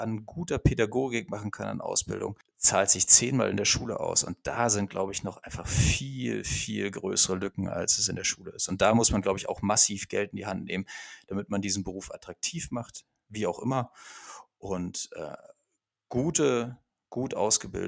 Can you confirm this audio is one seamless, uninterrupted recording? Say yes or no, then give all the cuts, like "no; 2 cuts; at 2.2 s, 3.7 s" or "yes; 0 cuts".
yes; 0 cuts